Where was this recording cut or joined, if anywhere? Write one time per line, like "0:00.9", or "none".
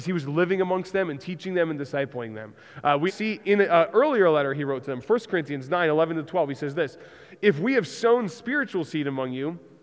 0:03.1